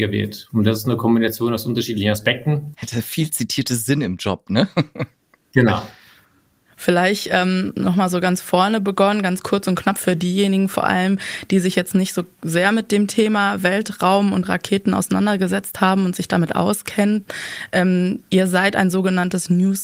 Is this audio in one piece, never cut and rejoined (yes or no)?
no